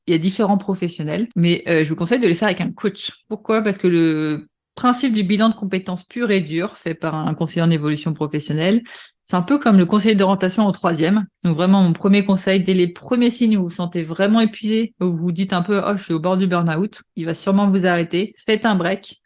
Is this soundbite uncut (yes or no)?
no